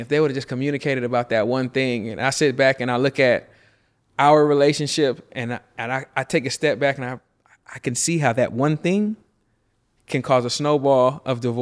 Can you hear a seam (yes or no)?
no